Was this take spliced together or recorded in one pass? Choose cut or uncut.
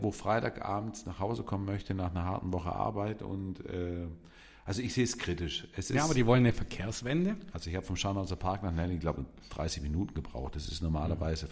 cut